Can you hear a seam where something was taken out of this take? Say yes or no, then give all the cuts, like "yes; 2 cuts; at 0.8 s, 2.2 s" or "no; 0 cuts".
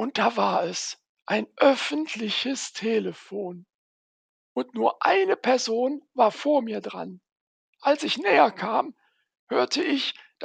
no; 0 cuts